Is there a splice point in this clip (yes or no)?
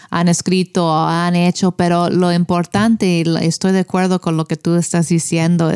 no